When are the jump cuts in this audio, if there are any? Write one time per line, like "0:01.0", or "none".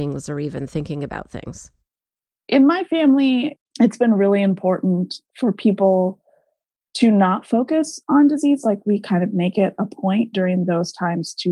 none